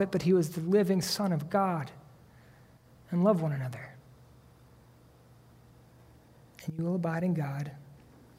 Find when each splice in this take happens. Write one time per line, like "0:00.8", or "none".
none